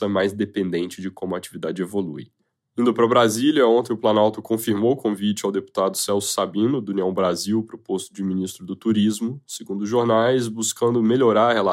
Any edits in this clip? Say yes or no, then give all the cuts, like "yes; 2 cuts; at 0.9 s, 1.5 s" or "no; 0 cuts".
yes; 1 cut; at 2.6 s